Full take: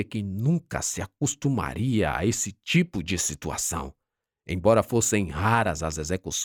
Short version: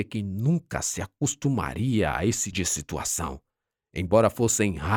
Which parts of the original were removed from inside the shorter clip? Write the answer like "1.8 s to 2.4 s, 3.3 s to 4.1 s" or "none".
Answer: 2.5 s to 3.0 s